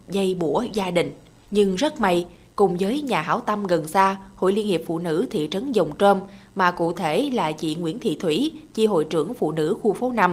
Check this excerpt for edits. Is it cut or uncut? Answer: uncut